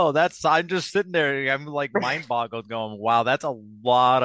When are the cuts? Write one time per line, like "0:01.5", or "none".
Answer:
none